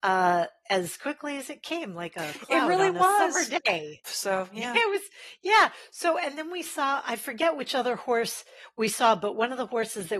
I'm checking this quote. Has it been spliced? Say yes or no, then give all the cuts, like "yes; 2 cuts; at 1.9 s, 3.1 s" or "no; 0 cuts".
yes; 1 cut; at 4.0 s